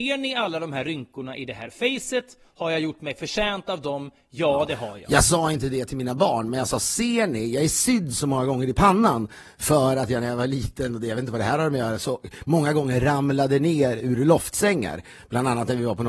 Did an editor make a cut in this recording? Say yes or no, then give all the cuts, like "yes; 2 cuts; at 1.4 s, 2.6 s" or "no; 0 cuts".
no; 0 cuts